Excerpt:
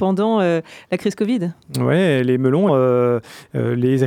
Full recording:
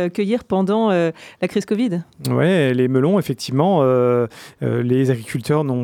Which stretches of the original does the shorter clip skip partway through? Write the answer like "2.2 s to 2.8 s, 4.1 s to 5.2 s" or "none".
3.2 s to 3.8 s